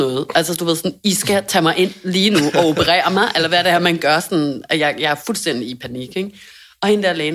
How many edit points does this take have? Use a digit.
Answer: 0